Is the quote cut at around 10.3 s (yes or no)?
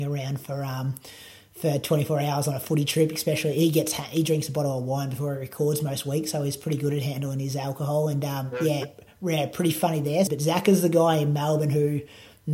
yes